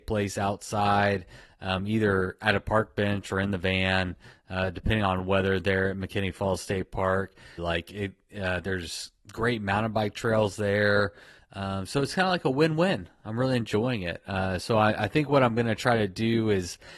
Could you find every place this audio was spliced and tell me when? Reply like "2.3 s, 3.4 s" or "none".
7.6 s, 11.4 s